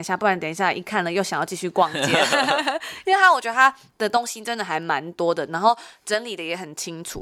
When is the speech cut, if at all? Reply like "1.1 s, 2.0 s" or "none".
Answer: none